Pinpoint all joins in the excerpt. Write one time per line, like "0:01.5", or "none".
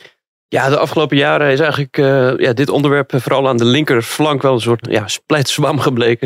0:04.8